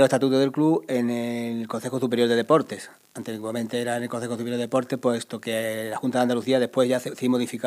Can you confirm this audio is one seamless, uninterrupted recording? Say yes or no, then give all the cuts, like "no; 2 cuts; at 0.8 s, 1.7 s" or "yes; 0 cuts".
yes; 0 cuts